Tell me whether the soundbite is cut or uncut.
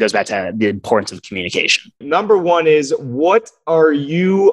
cut